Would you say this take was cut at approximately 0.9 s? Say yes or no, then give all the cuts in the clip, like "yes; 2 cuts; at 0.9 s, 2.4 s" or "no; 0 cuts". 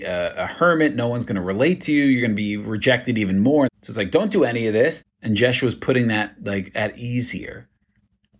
no; 2 cuts; at 3.7 s, 5.0 s